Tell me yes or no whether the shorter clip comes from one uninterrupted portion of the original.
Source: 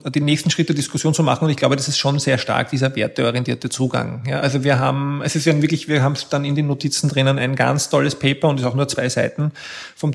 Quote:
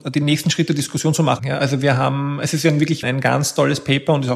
no